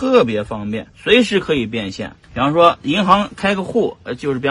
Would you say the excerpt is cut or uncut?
cut